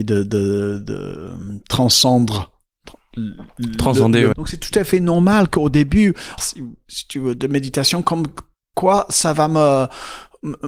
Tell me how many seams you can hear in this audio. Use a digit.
2